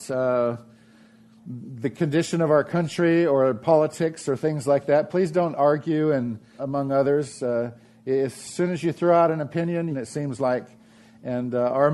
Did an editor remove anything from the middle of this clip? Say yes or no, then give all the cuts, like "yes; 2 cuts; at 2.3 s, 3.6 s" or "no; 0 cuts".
yes; 2 cuts; at 6.6 s, 9.9 s